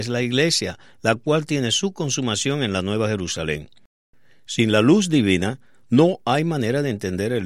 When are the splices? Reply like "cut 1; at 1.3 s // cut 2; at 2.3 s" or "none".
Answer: none

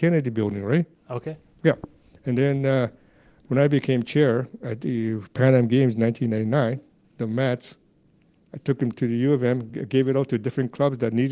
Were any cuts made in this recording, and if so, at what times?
none

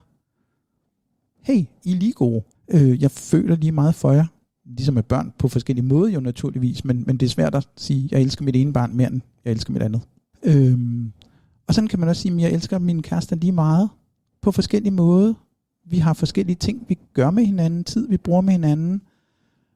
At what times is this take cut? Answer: cut 1; at 2.5 s // cut 2; at 10.3 s

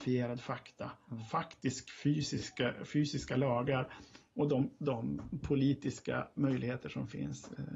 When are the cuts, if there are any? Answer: none

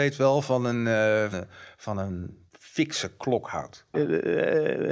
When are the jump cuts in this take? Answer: cut 1; at 1.3 s // cut 2; at 2.5 s // cut 3; at 3.9 s

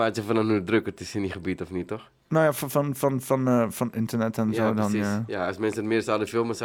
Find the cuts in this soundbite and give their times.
none

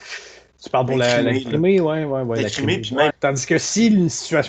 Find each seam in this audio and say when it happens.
cut 1; at 3.1 s

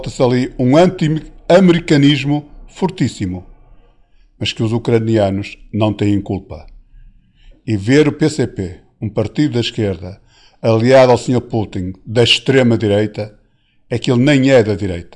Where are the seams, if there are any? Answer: none

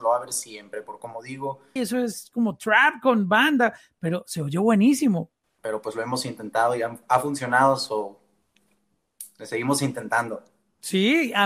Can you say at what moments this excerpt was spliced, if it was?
cut 1; at 1.8 s // cut 2; at 5.4 s

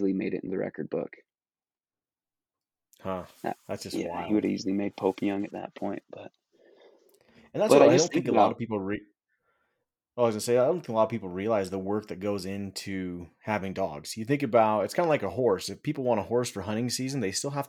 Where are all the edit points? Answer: none

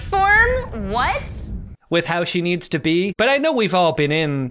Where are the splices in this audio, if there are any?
cut 1; at 1.7 s

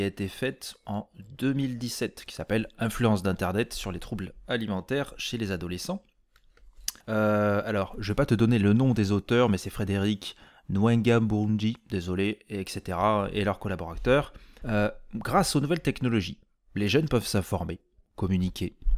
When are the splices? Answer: cut 1; at 7.0 s // cut 2; at 14.6 s

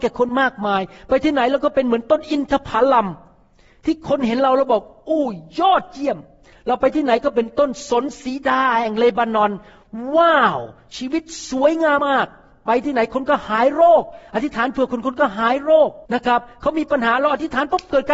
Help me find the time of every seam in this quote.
cut 1; at 12.0 s // cut 2; at 16.1 s

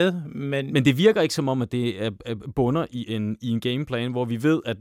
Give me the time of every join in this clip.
none

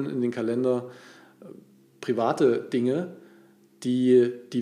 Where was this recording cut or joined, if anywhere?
none

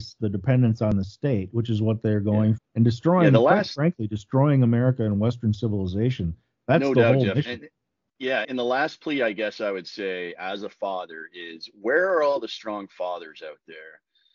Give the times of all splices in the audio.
cut 1; at 2.6 s // cut 2; at 8.4 s

